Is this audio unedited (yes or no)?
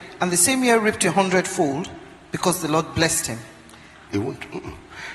no